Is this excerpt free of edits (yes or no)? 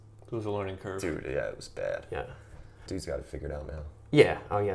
no